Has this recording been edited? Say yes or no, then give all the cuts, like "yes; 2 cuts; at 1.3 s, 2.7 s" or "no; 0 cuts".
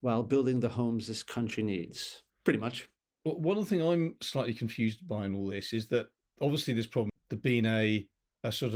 yes; 2 cuts; at 2.3 s, 7.1 s